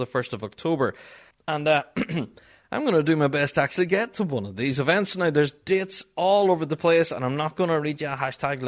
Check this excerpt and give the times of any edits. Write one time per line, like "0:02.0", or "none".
0:01.3